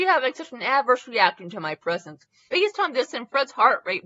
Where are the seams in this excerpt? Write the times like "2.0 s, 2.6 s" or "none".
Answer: 2.5 s